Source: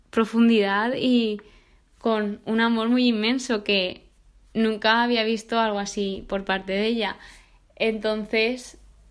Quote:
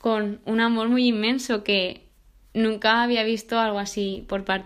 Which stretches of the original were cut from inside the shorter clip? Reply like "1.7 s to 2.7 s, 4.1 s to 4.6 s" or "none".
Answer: none